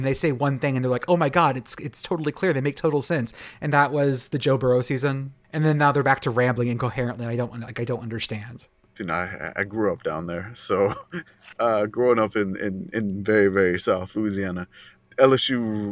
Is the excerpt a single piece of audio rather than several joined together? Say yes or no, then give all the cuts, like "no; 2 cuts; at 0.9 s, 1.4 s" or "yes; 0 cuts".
yes; 0 cuts